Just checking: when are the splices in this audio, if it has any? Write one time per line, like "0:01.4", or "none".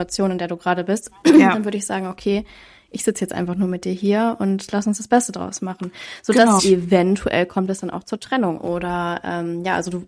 0:06.6
0:08.6

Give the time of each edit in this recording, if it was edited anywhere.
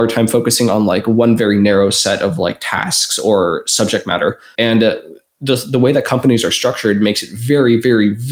0:04.5

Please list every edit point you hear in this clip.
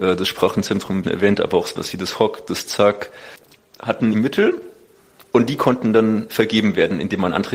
0:01.0
0:04.1

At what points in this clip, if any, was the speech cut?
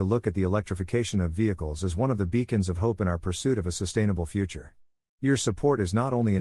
none

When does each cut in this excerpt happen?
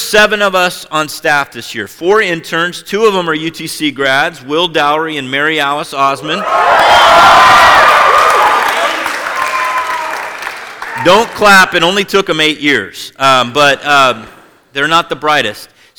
none

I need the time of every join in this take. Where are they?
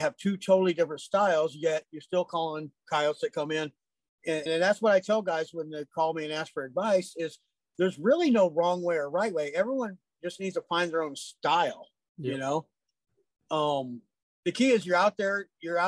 0:04.5

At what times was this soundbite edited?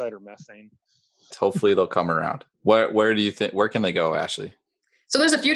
0:01.3
0:02.5

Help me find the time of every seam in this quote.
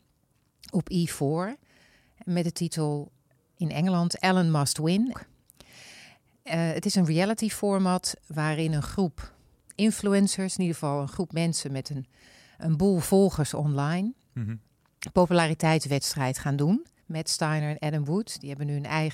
0:05.1
0:17.0

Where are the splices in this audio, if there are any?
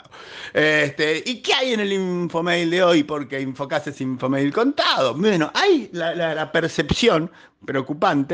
none

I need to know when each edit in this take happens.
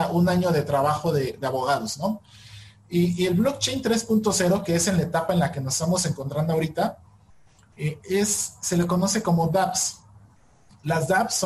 none

